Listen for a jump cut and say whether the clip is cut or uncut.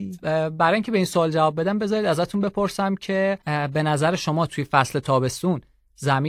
cut